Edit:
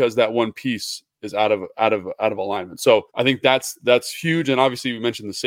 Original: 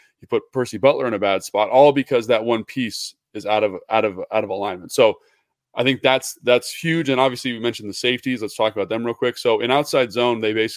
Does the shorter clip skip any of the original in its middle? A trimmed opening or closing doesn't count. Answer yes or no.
yes